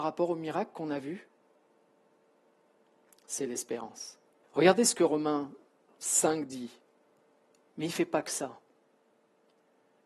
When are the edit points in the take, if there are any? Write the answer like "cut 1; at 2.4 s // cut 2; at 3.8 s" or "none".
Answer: cut 1; at 4.4 s // cut 2; at 7.7 s